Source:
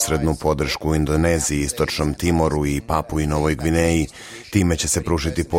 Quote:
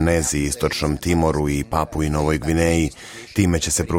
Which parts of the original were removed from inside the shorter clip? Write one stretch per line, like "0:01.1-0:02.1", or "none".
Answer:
none